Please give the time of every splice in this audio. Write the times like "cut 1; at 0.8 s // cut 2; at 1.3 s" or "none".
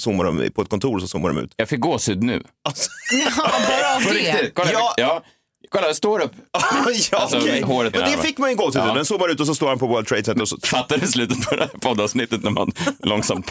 cut 1; at 7.9 s // cut 2; at 10.6 s